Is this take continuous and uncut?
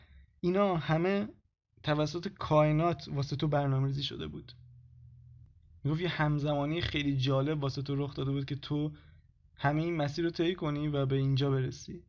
yes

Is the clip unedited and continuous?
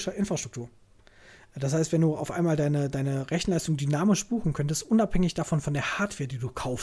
yes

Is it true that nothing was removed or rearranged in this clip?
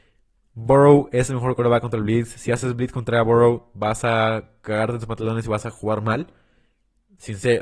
yes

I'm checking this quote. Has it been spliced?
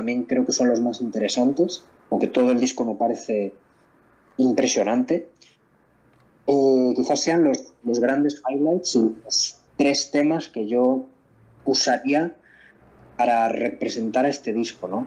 yes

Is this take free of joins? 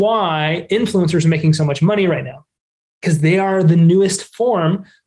yes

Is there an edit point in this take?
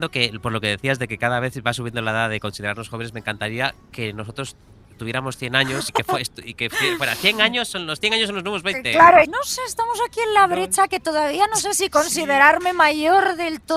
yes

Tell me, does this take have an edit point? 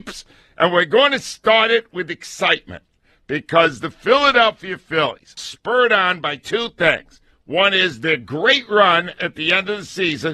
yes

